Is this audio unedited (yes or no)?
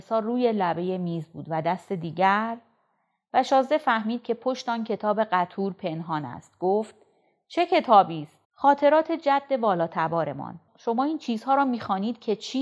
no